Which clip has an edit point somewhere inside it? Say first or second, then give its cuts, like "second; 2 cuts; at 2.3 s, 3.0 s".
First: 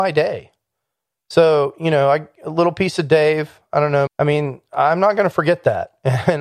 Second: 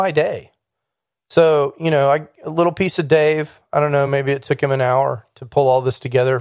first; 1 cut; at 4.1 s